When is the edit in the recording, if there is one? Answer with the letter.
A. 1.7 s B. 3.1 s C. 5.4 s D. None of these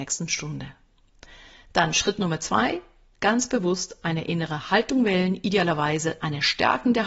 D